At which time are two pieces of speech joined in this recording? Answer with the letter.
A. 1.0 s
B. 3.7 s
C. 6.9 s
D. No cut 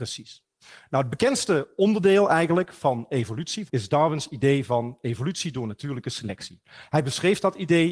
B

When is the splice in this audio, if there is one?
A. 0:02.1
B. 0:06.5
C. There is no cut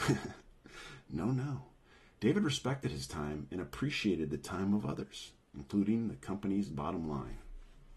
C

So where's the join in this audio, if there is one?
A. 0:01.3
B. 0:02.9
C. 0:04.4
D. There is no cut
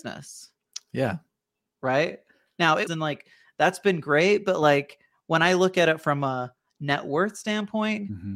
B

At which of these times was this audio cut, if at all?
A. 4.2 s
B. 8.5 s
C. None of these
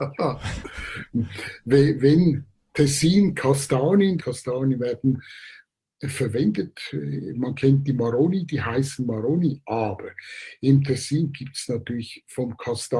A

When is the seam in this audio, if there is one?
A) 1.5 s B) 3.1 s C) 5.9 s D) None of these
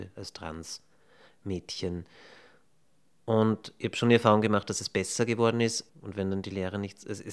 C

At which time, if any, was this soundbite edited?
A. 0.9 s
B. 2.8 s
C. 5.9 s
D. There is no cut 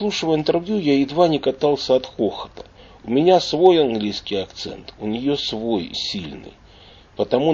C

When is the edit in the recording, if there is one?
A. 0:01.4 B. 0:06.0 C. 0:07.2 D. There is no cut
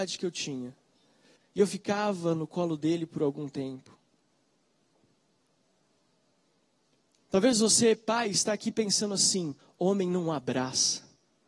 A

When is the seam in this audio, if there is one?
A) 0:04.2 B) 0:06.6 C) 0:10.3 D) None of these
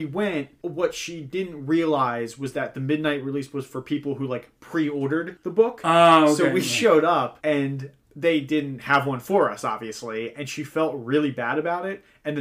C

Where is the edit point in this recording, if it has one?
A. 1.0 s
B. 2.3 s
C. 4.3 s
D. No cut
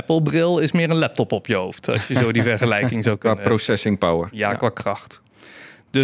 D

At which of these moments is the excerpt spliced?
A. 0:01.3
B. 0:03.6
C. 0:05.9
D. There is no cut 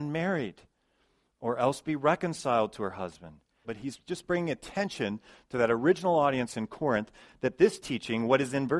B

